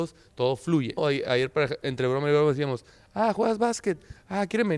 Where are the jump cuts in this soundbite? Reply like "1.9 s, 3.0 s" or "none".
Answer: 1.0 s